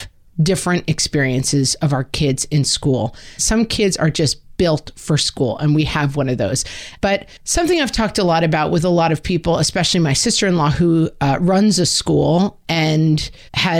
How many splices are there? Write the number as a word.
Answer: two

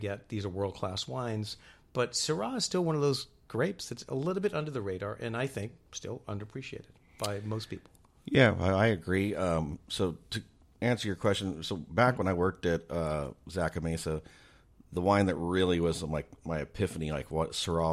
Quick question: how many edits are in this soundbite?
zero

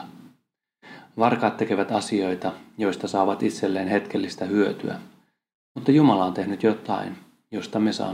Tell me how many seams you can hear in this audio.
zero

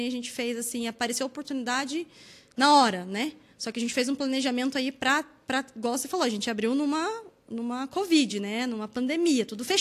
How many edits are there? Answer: zero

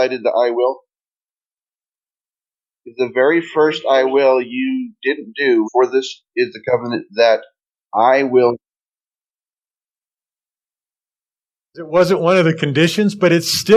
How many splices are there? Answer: one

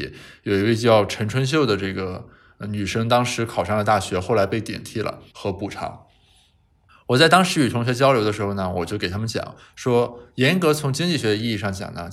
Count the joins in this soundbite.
one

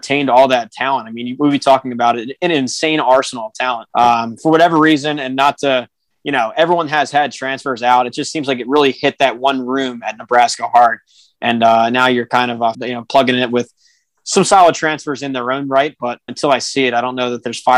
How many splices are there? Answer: three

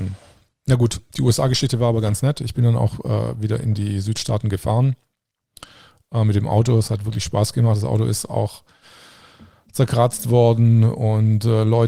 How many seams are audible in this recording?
zero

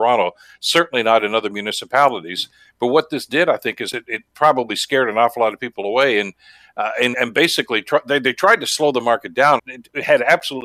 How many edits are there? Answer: two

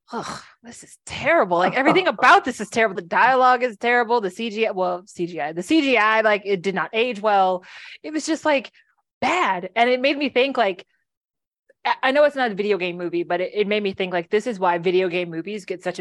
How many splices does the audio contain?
one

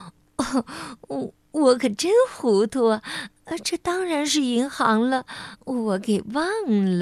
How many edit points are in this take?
one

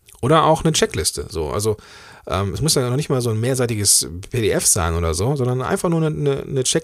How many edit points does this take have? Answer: zero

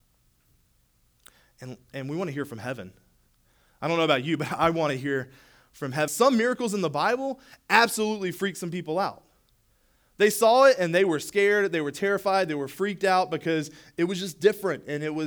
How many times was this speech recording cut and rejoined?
one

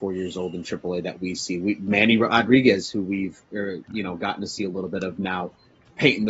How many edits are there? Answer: zero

